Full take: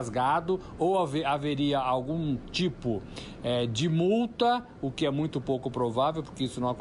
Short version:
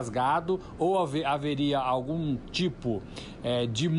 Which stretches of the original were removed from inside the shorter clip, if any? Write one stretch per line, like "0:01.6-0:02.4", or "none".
none